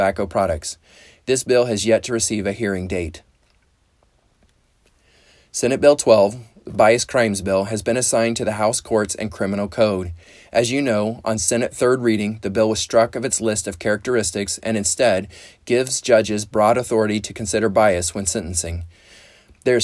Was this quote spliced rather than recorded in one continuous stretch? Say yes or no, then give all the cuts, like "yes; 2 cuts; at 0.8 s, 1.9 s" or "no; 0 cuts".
no; 0 cuts